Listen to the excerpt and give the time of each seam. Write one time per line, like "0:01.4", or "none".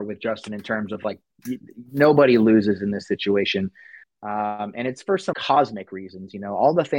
0:04.0
0:05.3